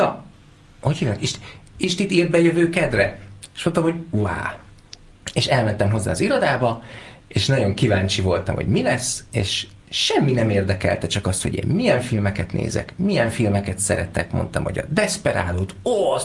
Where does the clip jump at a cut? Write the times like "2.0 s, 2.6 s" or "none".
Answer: none